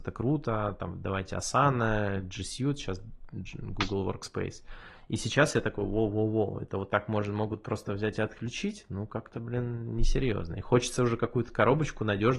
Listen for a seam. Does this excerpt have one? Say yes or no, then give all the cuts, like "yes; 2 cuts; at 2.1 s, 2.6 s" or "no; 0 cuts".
no; 0 cuts